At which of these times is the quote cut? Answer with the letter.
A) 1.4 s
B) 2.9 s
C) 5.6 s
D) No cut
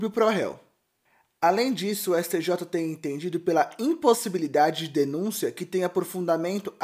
D